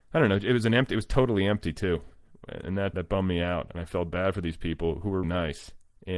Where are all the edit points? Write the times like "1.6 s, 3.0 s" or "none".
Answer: 2.9 s, 5.2 s